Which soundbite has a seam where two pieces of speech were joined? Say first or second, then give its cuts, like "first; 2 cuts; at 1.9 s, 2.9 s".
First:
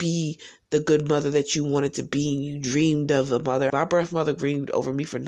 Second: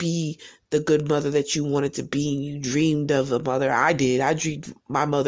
first; 1 cut; at 3.7 s